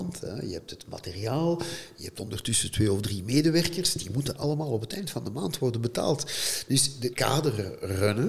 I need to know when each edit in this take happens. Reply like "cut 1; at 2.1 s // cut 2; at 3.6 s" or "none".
cut 1; at 7.1 s

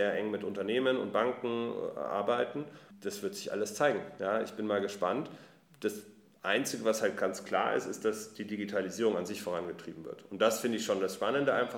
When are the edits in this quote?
none

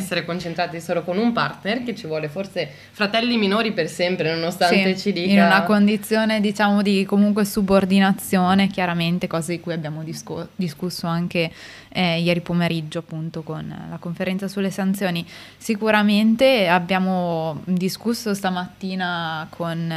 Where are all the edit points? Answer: none

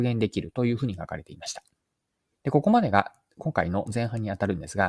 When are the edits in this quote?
cut 1; at 2.4 s

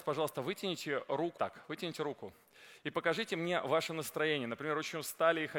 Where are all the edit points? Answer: cut 1; at 1.4 s

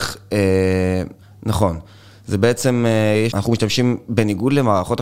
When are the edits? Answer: cut 1; at 1.2 s // cut 2; at 3.3 s

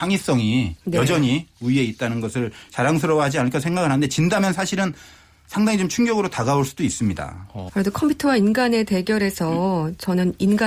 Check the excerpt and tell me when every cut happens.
cut 1; at 7.7 s

